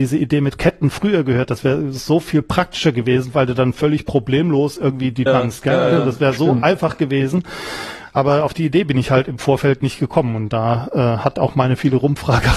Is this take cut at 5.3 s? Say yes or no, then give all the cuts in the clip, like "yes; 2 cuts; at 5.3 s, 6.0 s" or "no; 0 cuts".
yes; 1 cut; at 5.3 s